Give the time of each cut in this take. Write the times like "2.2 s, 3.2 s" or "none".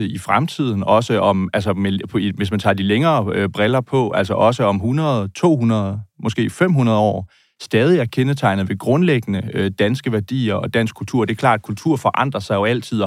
none